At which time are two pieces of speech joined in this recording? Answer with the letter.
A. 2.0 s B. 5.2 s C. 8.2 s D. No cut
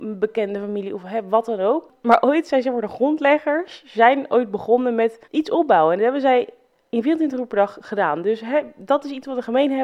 B